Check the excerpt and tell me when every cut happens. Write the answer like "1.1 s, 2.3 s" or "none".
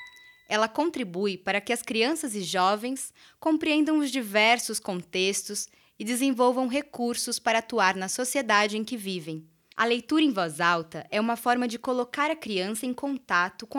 9.7 s